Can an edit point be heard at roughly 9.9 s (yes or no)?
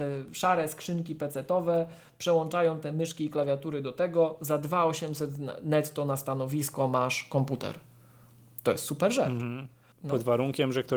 yes